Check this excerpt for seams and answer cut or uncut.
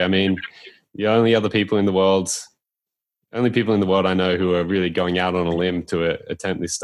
uncut